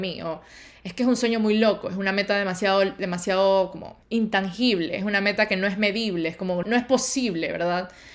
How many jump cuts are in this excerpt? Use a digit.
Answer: 2